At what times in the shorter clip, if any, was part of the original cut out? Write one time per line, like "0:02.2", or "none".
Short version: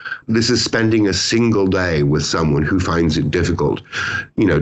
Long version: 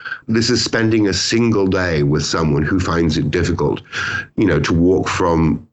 none